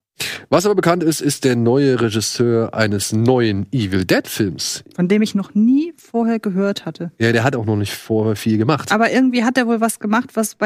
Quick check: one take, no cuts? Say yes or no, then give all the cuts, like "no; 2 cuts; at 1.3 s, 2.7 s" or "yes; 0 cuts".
yes; 0 cuts